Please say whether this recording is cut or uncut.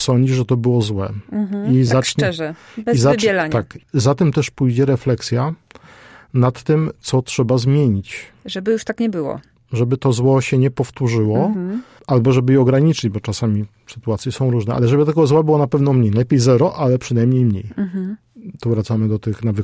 uncut